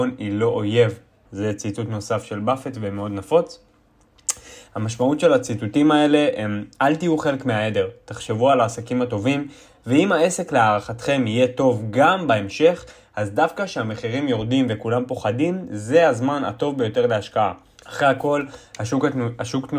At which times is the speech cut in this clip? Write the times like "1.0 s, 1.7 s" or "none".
1.2 s, 4.7 s, 17.8 s